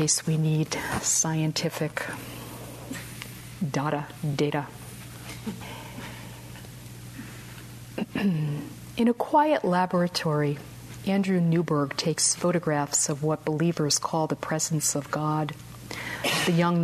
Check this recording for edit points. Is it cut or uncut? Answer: uncut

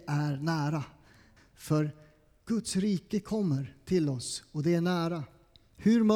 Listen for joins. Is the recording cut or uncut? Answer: cut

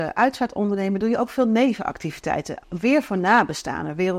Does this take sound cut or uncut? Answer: cut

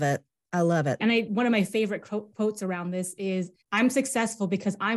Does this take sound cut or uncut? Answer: cut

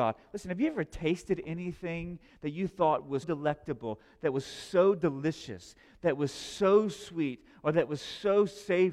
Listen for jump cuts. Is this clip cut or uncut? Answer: cut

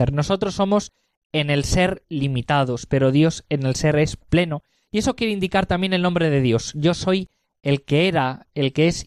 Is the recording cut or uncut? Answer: uncut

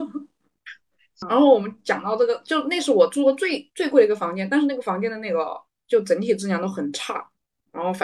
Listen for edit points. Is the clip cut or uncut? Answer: uncut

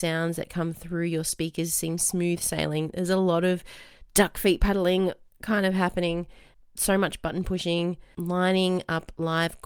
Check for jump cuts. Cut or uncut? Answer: uncut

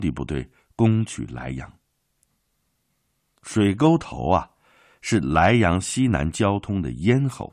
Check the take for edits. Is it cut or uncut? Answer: uncut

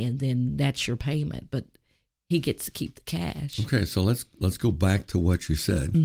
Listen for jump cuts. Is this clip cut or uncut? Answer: uncut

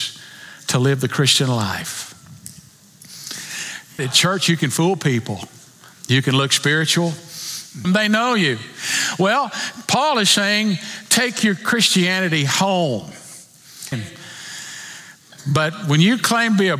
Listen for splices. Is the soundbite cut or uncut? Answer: cut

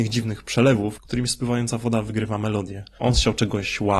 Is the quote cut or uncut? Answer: cut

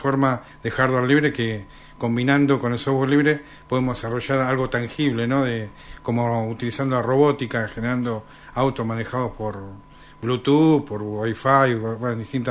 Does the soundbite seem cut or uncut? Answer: uncut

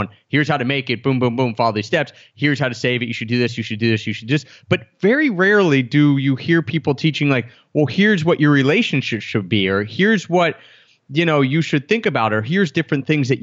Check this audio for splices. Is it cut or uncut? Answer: uncut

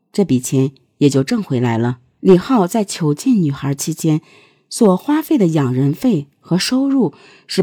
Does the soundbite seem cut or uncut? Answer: cut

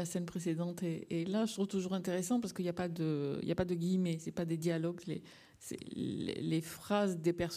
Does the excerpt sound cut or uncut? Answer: uncut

